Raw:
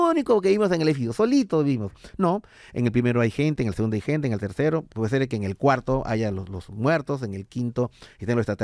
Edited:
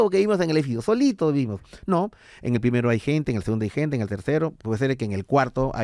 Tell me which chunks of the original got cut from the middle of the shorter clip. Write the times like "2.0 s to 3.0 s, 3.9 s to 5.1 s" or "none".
none